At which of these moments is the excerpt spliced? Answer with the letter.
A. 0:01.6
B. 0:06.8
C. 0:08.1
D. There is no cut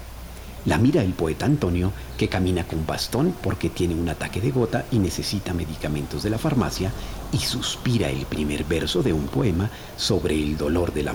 D